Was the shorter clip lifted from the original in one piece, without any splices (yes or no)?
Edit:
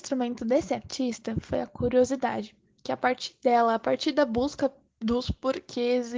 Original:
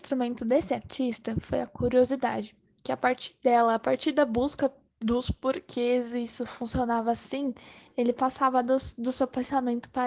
yes